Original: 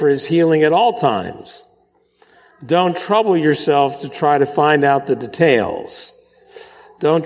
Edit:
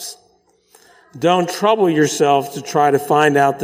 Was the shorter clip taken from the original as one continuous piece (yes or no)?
yes